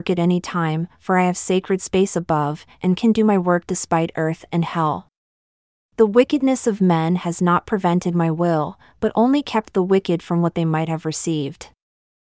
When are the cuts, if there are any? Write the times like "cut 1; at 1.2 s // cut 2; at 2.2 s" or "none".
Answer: none